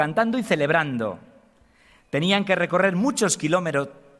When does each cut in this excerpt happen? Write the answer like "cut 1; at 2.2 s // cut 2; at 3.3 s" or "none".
none